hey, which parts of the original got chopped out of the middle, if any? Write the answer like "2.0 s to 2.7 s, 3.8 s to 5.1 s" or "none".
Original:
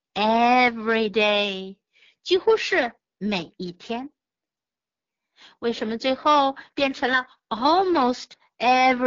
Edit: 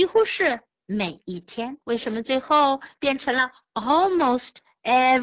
4.1 s to 5.6 s